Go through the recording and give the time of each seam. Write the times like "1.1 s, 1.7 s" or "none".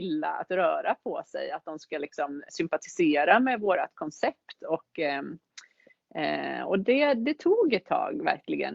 2.5 s

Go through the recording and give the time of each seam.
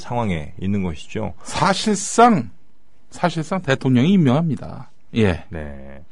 5.1 s

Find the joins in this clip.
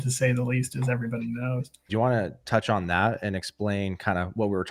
1.9 s

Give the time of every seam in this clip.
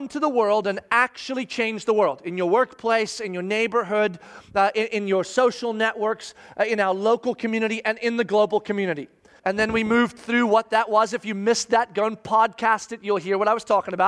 9.4 s

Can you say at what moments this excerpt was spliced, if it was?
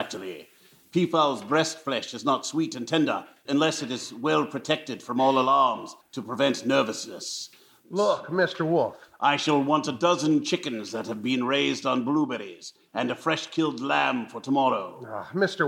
6.0 s, 7.8 s

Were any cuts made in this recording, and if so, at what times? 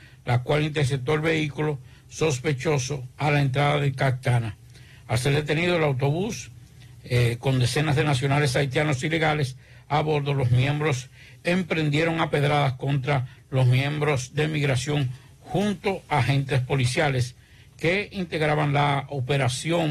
none

